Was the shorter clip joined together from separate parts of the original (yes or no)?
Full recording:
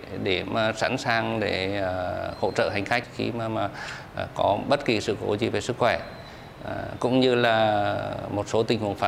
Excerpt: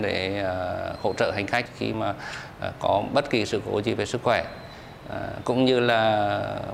yes